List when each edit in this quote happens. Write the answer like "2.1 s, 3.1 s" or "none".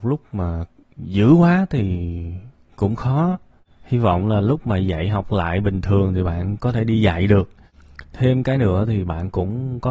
none